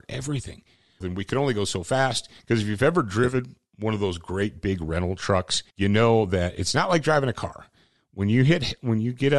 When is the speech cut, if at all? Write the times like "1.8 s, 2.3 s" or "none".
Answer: 1.0 s, 2.4 s, 5.7 s